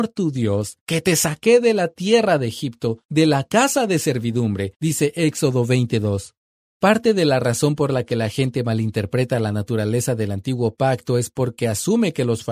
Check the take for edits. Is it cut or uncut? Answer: uncut